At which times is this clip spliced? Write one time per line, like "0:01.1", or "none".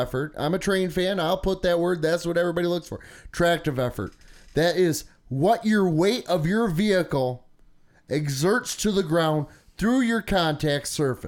none